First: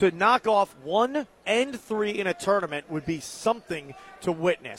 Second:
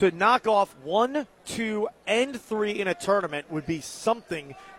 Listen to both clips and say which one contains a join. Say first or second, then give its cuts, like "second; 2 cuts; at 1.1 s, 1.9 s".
first; 1 cut; at 1.4 s